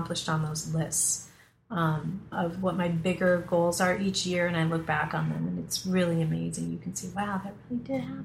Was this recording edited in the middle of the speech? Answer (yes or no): yes